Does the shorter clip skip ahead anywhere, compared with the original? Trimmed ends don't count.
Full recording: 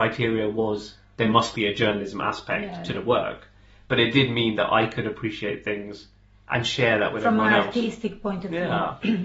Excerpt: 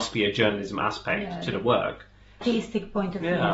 yes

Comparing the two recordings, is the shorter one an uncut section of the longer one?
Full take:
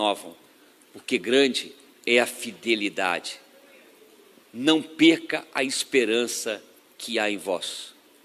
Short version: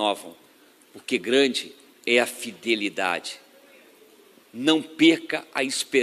yes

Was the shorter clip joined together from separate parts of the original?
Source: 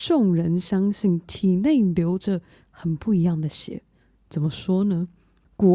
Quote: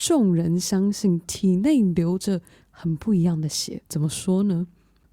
yes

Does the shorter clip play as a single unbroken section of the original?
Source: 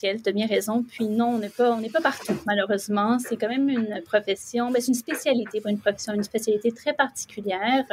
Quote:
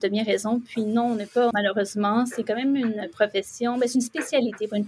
no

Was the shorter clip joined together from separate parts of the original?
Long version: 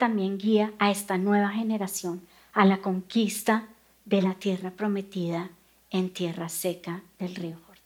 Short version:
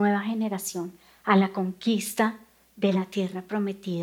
no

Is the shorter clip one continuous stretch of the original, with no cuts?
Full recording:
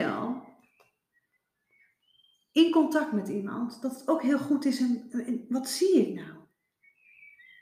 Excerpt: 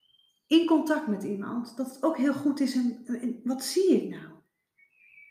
yes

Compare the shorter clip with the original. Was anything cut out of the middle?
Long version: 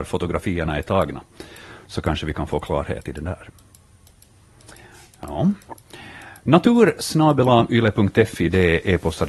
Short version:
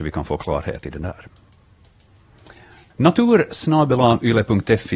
yes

